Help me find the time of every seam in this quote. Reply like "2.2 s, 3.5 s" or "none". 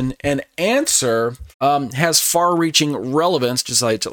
1.5 s